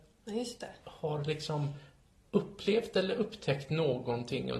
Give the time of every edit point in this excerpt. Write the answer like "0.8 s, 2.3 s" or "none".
none